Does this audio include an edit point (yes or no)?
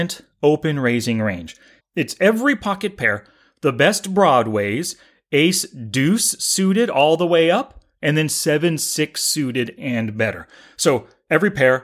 yes